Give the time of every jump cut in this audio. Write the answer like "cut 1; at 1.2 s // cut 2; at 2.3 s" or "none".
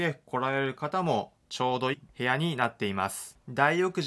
cut 1; at 1.9 s